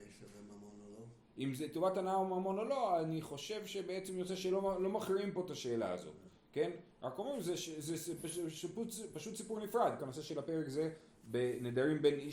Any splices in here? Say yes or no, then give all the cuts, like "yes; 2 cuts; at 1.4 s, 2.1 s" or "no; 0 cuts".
yes; 1 cut; at 10.0 s